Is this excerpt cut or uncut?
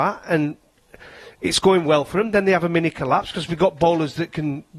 uncut